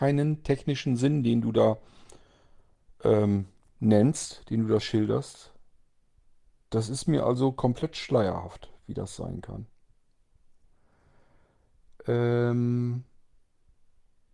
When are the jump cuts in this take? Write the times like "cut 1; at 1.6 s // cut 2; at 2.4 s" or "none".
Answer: none